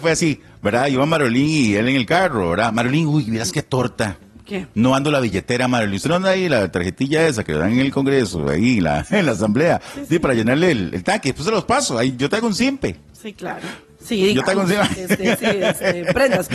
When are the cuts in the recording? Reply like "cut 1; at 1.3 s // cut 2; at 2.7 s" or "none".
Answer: cut 1; at 15.0 s